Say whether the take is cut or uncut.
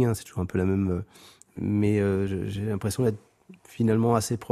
uncut